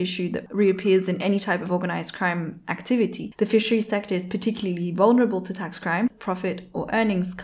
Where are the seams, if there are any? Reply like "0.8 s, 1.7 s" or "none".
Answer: 3.4 s, 6.1 s